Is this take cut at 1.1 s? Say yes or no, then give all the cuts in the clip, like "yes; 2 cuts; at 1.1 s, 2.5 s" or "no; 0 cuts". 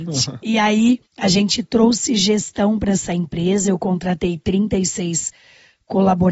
yes; 1 cut; at 1.1 s